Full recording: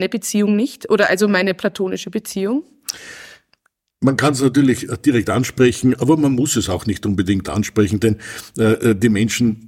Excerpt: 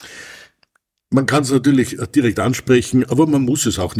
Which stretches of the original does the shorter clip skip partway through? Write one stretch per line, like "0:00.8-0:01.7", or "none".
none